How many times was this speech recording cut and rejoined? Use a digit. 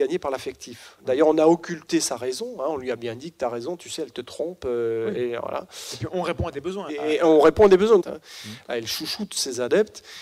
2